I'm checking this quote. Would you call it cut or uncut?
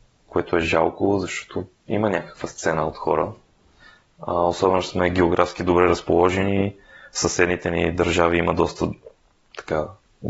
uncut